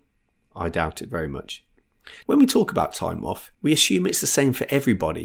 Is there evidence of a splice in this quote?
yes; 2 cuts; at 2.2 s, 3.5 s

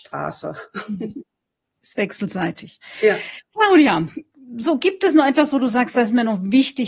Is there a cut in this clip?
no; 0 cuts

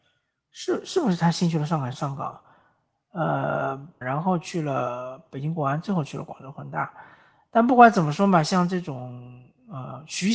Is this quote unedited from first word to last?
no; 2 cuts; at 1.9 s, 4.0 s

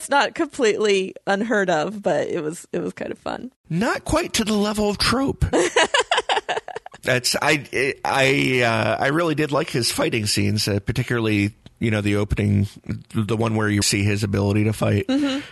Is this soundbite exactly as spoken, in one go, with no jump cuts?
no; 1 cut; at 13.8 s

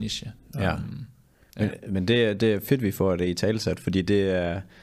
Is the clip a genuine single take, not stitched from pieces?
yes; 0 cuts

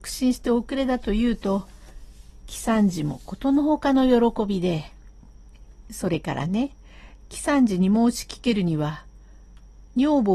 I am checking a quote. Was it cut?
no; 0 cuts

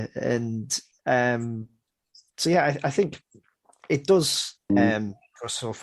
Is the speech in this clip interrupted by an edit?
yes; 1 cut; at 4.7 s

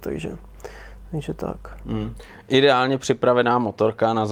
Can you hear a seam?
no; 0 cuts

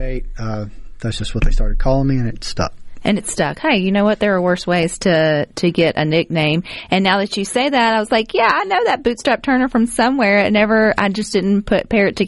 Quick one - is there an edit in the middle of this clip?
no; 0 cuts

